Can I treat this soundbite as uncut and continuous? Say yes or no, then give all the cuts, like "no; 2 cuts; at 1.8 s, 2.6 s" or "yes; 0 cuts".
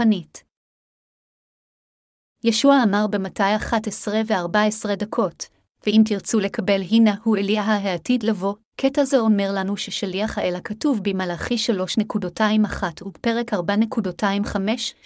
no; 1 cut; at 2.4 s